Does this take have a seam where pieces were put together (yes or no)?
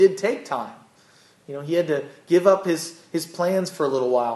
no